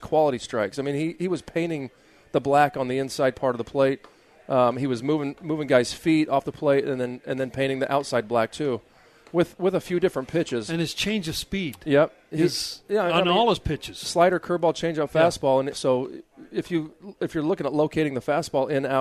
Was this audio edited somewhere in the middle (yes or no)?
yes